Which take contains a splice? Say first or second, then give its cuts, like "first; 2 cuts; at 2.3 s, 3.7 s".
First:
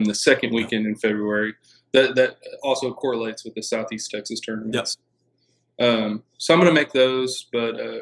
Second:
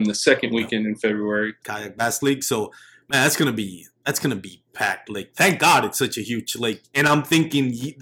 second; 2 cuts; at 1.6 s, 6.8 s